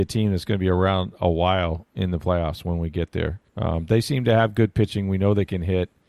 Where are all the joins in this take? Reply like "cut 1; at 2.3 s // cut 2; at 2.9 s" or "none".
cut 1; at 3.5 s

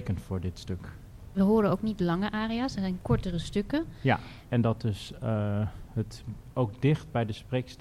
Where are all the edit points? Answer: cut 1; at 4.5 s

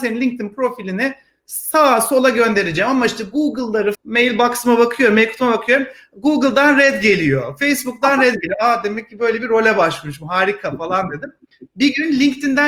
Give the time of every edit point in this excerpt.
cut 1; at 3.9 s

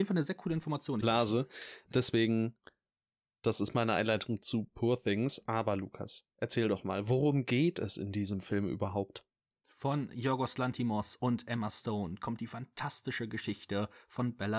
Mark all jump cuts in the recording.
cut 1; at 1.0 s

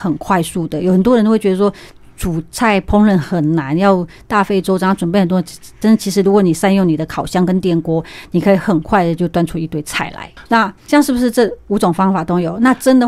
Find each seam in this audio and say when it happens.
cut 1; at 10.4 s

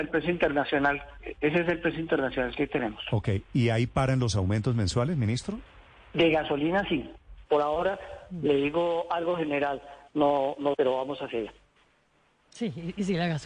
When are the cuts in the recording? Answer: cut 1; at 7.5 s // cut 2; at 10.8 s

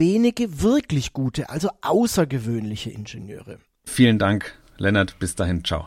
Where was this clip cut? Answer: cut 1; at 3.9 s

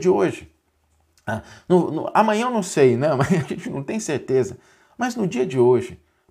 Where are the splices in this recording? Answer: none

